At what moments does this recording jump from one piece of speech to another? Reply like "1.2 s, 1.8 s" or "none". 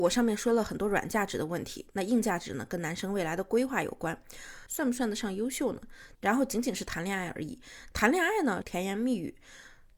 4.7 s, 6.1 s, 8.6 s